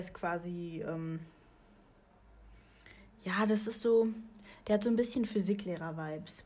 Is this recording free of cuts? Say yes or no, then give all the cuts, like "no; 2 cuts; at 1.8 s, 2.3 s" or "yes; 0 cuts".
yes; 0 cuts